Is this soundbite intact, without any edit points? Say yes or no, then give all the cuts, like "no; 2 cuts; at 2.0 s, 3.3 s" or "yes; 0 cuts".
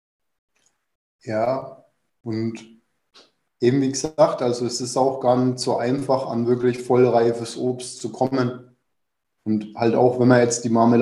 no; 1 cut; at 9.4 s